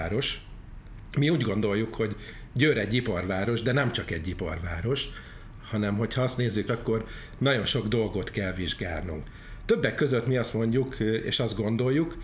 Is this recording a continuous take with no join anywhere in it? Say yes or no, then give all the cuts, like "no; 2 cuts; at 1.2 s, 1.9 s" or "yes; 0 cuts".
no; 1 cut; at 6.7 s